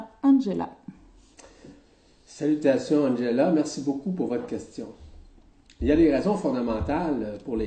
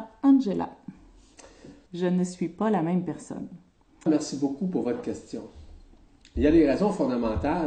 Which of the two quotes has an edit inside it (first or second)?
second